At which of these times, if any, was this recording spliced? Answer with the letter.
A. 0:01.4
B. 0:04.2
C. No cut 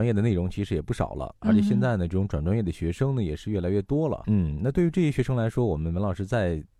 B